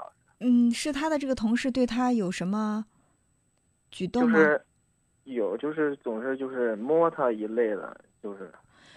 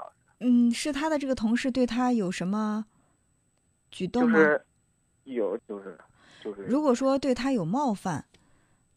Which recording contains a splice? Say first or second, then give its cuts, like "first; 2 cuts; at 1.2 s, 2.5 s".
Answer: second; 1 cut; at 5.6 s